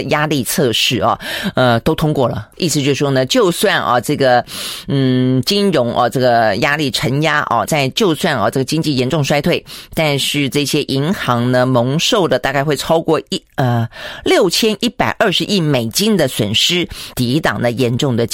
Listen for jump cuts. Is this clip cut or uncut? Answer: cut